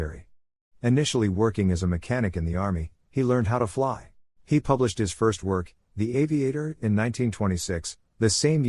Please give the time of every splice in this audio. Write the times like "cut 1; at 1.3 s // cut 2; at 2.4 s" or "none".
cut 1; at 4.4 s